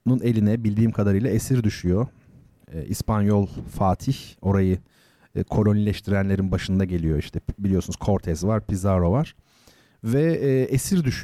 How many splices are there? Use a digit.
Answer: 0